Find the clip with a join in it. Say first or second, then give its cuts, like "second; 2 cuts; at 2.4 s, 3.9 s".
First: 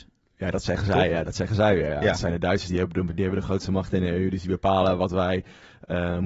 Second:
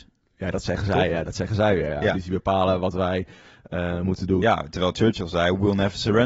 second; 2 cuts; at 2.1 s, 4.4 s